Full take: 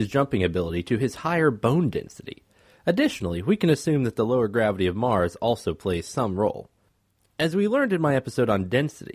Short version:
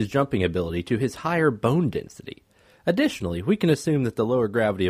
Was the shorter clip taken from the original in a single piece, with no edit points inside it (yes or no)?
yes